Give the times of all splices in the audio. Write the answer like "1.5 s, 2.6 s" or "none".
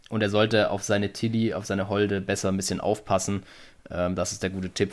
none